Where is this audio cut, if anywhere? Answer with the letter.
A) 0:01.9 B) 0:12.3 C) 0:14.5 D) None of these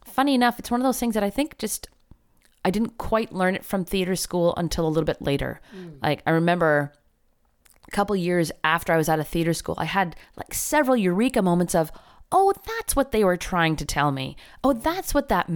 D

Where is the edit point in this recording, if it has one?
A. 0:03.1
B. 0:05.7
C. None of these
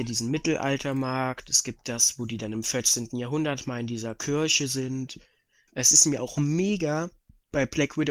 B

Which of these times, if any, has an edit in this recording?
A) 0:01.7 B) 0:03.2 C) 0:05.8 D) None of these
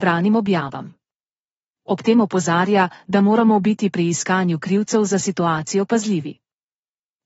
A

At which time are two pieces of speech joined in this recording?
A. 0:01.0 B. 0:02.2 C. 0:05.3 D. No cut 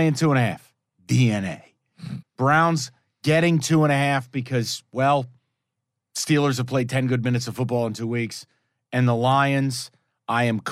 B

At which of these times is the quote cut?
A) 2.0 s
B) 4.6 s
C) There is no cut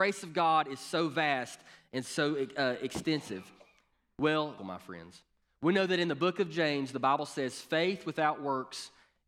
B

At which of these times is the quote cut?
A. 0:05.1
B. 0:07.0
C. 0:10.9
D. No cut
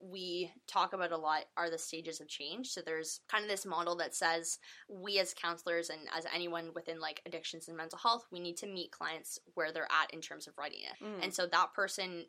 C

